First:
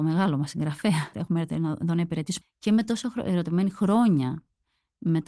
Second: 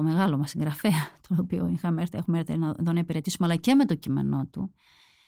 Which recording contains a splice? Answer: first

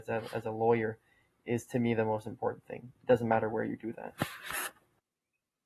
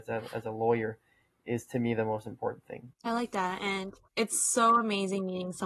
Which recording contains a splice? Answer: second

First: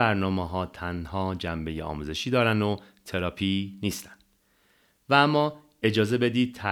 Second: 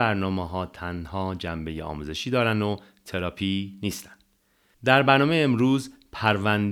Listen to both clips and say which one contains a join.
second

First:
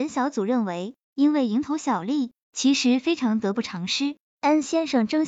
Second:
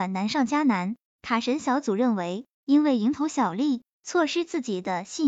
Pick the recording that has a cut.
first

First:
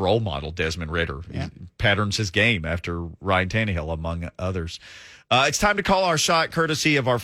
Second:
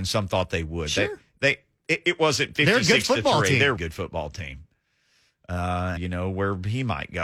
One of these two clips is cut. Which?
second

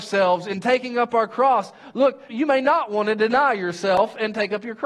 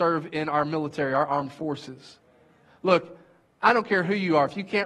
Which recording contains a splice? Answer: first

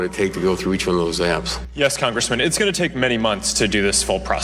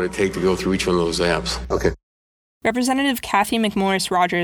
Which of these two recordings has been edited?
second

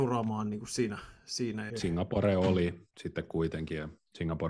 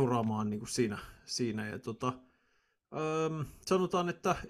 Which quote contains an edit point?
first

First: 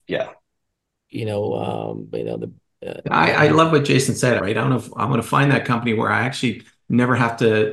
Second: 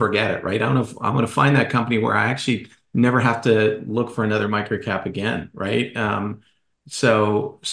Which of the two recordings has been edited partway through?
first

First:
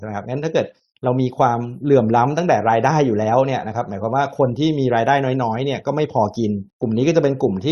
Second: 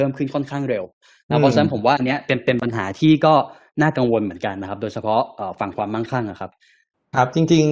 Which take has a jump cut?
first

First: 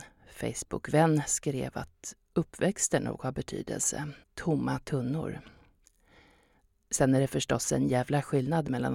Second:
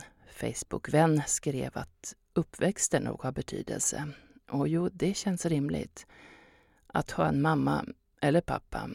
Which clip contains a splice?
first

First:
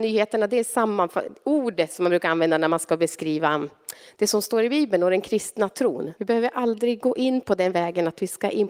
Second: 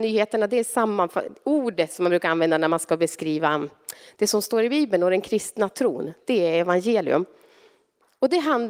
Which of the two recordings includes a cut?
first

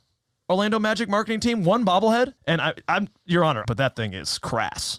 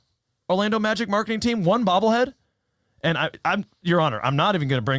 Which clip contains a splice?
first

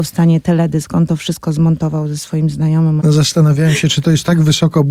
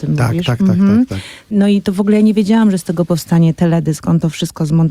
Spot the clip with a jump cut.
first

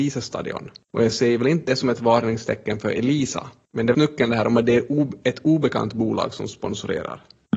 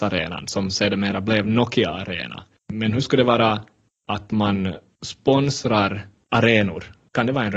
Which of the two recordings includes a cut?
first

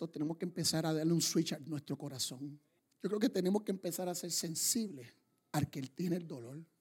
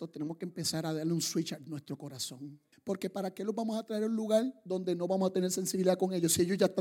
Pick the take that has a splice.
second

